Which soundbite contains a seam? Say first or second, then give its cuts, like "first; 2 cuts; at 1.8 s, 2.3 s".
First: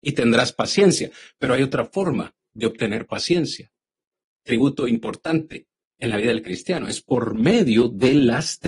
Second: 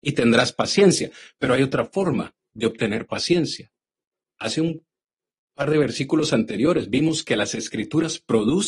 second; 1 cut; at 4.3 s